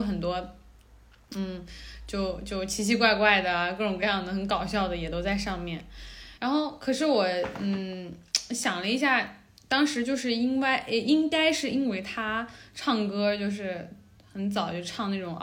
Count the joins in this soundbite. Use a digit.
1